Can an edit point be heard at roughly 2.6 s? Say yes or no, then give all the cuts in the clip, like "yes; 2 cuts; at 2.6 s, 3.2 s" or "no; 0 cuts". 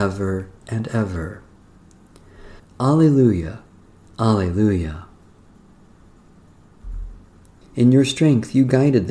yes; 2 cuts; at 2.6 s, 7.6 s